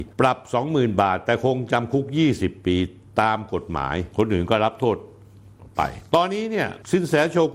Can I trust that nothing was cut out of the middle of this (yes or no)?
no